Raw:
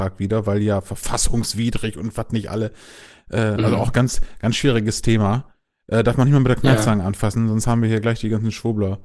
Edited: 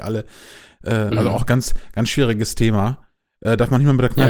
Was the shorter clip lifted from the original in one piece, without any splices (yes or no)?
yes